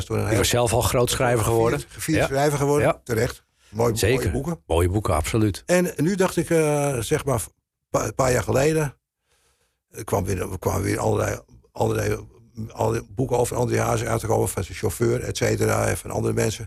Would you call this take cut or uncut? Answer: uncut